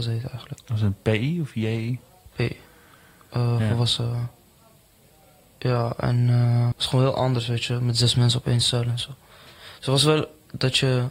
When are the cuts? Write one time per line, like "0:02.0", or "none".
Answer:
0:06.7